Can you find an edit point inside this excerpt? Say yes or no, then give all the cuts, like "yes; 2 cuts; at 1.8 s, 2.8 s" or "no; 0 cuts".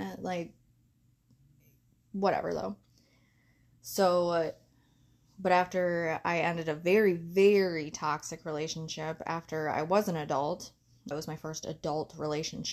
yes; 1 cut; at 11.1 s